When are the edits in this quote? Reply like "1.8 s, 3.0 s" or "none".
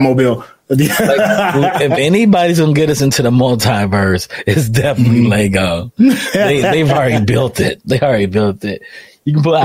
none